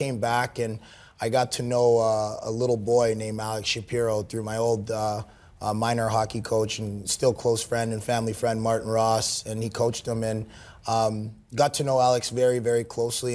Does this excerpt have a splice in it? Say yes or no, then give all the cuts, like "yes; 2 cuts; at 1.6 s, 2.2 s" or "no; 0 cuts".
no; 0 cuts